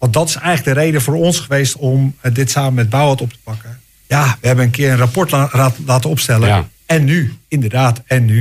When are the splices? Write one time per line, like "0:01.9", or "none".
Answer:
0:04.0
0:07.4